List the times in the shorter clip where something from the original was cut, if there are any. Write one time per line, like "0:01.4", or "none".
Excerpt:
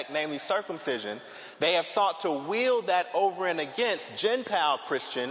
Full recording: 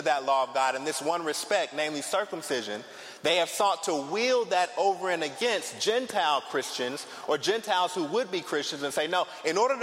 none